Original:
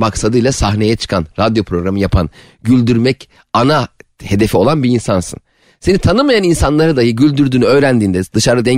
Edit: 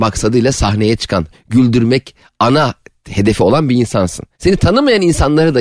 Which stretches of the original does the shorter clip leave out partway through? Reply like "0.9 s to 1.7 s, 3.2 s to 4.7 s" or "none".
1.3 s to 2.5 s, 5.5 s to 5.8 s